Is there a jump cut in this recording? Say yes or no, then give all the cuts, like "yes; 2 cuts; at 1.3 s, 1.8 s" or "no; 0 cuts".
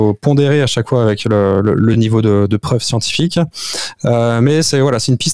no; 0 cuts